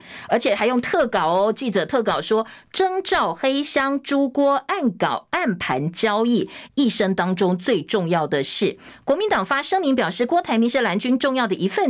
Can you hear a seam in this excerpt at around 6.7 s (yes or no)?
yes